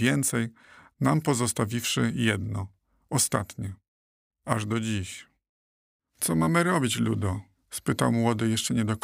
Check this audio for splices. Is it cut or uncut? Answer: cut